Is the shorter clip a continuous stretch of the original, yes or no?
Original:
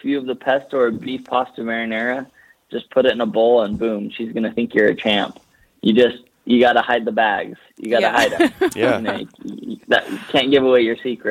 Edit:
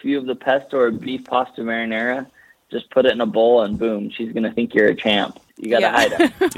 no